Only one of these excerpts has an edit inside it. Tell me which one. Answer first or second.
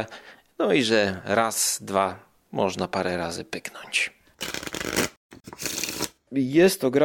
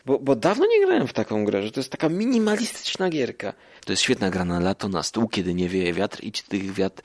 second